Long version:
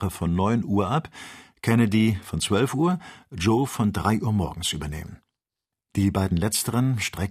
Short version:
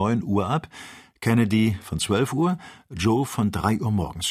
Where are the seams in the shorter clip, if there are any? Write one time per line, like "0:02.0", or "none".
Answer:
none